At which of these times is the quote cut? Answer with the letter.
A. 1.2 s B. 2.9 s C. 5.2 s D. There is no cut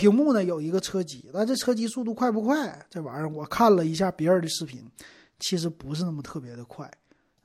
D